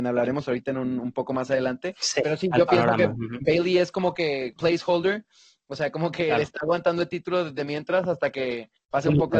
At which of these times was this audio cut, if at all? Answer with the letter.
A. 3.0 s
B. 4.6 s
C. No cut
B